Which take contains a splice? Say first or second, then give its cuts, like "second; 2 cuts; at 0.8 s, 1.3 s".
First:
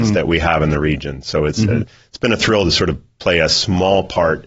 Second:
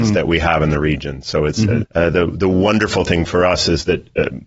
second; 1 cut; at 1.8 s